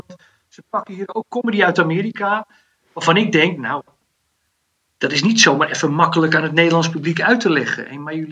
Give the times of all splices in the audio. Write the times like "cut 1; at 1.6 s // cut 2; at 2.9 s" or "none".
none